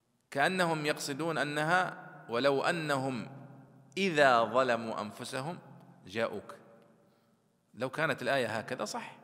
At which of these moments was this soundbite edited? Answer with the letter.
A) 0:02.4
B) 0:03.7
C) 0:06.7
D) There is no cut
D